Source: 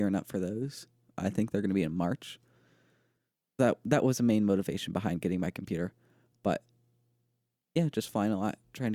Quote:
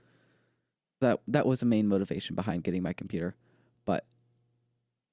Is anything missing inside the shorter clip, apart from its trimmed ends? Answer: no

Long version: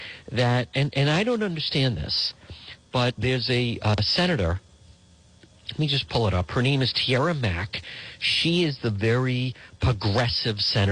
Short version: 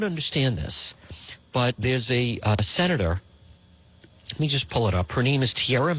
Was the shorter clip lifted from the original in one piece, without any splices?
yes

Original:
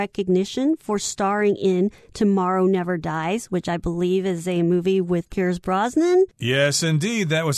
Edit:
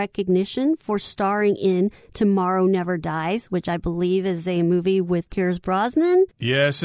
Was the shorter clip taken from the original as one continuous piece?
yes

